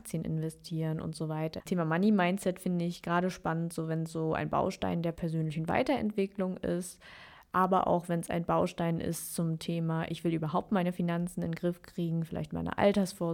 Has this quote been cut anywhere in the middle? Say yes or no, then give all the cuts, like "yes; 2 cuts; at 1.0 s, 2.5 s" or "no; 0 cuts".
yes; 1 cut; at 1.6 s